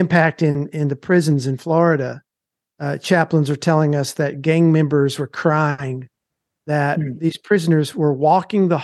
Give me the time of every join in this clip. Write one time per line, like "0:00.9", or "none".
none